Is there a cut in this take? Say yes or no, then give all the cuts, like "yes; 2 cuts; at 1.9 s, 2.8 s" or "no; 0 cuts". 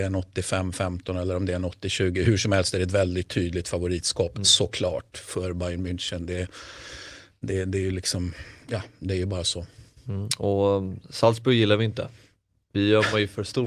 no; 0 cuts